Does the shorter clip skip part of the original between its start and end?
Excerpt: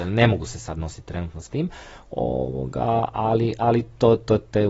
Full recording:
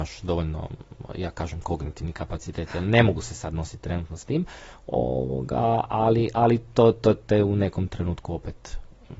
no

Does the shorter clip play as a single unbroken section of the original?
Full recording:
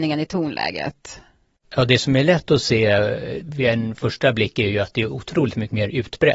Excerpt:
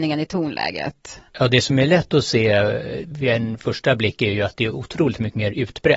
no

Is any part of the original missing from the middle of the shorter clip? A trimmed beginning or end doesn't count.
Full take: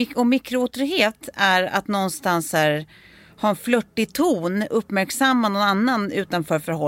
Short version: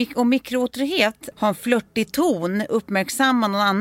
yes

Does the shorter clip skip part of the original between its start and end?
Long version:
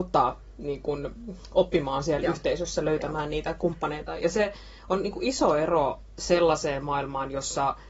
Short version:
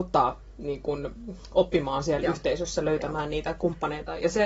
no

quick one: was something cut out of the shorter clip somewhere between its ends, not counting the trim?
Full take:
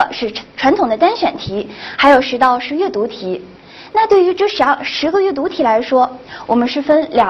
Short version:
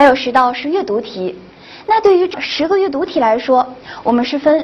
yes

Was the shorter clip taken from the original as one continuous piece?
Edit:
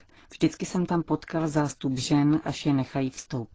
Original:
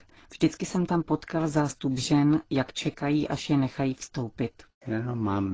no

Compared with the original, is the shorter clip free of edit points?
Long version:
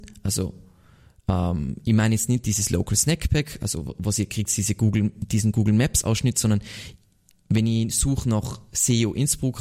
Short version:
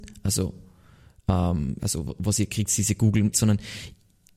no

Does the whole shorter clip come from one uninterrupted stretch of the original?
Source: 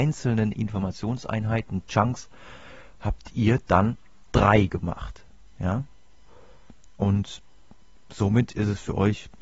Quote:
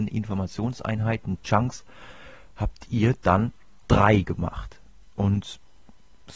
no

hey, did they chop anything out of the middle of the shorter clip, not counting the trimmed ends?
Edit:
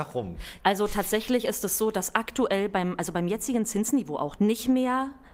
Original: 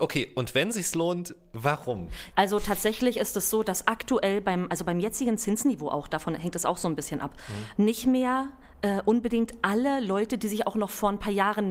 yes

